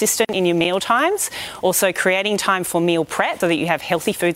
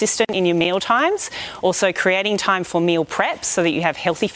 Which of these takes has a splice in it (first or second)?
first